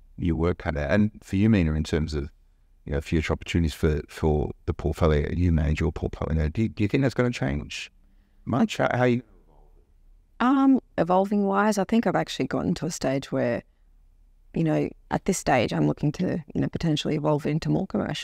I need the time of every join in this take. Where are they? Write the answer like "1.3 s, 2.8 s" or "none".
none